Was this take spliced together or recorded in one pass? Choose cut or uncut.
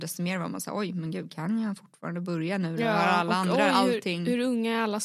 uncut